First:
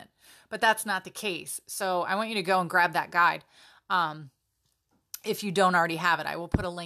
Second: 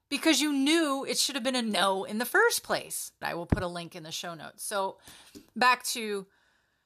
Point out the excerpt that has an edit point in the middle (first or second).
second